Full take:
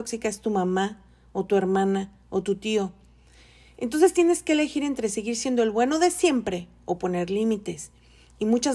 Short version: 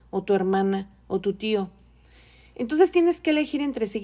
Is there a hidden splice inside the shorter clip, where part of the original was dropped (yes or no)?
no